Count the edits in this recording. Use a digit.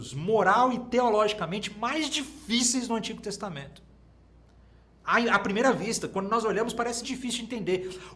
1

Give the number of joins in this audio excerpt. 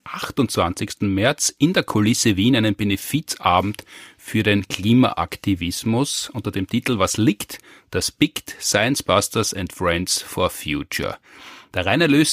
0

